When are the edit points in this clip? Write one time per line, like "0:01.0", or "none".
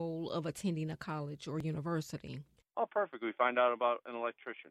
0:02.6